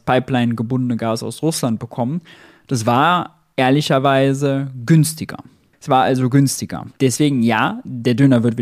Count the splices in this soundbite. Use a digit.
1